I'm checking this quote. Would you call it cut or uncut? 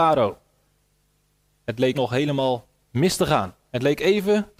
cut